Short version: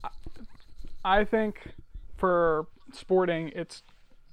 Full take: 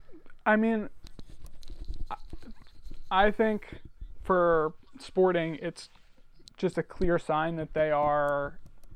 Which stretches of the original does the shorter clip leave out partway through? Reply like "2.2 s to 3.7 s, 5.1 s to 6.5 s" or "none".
none